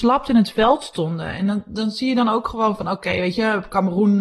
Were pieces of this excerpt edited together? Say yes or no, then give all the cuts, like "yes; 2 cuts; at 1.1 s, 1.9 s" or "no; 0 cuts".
no; 0 cuts